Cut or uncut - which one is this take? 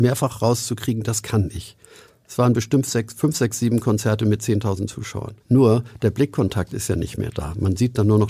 cut